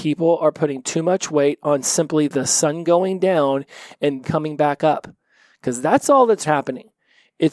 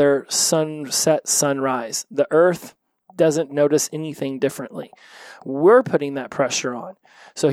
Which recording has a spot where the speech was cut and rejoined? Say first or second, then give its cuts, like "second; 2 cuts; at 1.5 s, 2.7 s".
first; 2 cuts; at 4.2 s, 6.5 s